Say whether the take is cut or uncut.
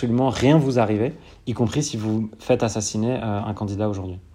uncut